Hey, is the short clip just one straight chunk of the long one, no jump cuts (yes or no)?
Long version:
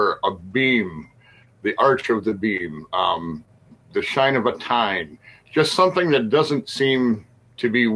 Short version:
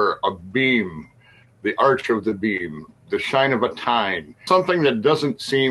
no